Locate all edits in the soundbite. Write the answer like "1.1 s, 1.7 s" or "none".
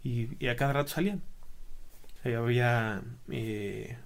2.2 s